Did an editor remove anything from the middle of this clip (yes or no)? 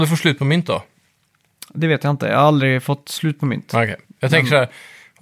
no